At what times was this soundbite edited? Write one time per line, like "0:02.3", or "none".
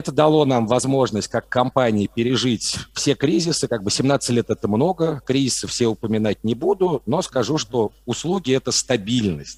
none